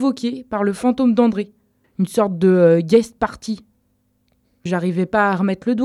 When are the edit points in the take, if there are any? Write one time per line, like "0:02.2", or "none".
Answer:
0:01.8
0:04.7

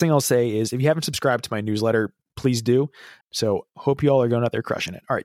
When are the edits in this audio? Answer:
0:03.2

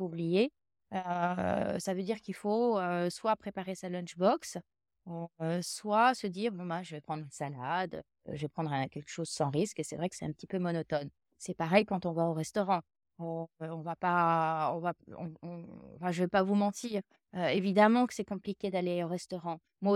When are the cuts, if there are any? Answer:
none

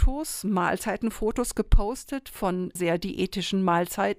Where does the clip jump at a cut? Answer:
0:02.8

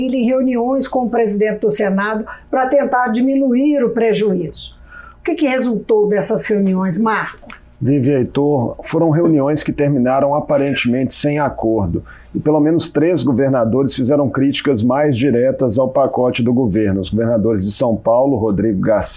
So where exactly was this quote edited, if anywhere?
none

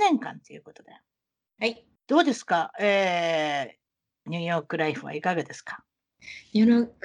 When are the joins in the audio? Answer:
0:02.0
0:04.3

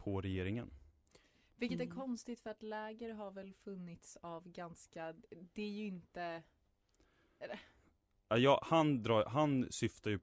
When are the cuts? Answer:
none

